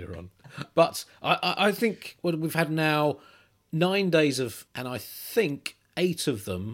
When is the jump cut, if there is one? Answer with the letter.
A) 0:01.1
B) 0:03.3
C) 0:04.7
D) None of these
C